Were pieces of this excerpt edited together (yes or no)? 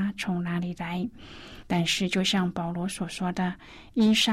yes